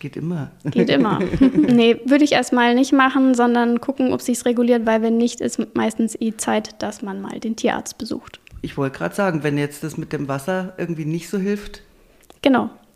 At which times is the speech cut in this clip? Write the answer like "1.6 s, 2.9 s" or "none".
1.7 s